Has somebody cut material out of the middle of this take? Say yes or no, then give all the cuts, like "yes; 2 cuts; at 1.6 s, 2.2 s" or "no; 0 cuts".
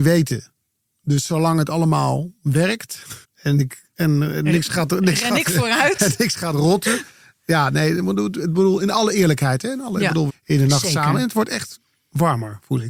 yes; 2 cuts; at 3.2 s, 10.3 s